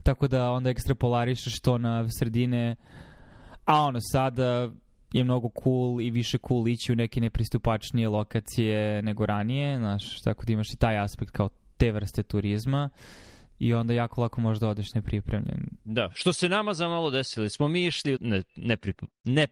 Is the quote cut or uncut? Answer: cut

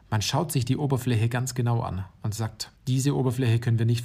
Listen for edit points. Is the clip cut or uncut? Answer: cut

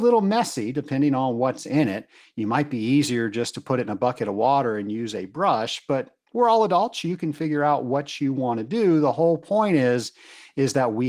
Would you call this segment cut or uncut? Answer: uncut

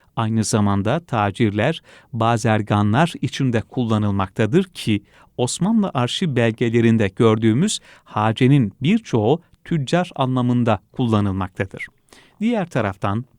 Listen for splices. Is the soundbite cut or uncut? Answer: uncut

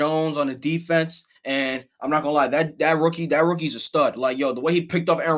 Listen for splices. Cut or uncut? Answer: uncut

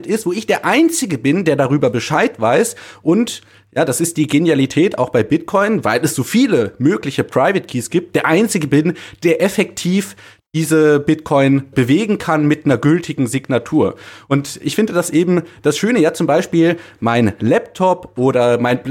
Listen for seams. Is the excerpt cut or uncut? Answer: cut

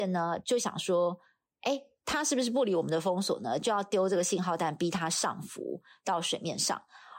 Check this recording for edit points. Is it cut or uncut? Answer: uncut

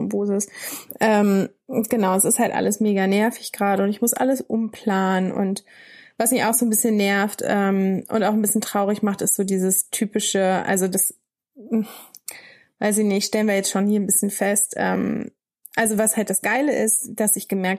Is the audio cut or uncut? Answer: uncut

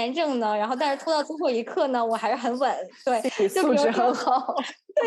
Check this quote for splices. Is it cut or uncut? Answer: uncut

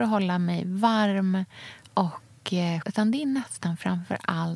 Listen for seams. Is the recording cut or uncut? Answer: cut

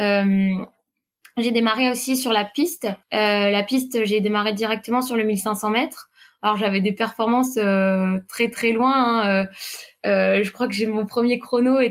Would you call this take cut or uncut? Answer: cut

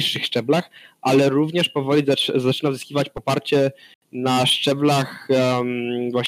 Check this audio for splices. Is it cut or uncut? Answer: uncut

